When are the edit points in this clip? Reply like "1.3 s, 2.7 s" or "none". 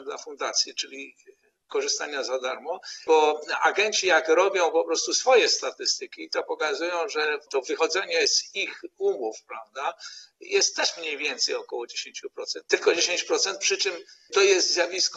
12.6 s